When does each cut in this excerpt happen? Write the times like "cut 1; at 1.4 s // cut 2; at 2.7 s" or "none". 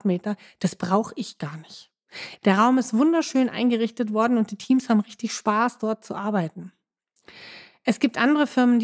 cut 1; at 2.4 s